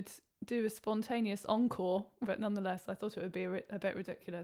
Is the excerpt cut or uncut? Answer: cut